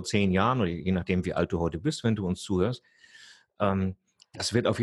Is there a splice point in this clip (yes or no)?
no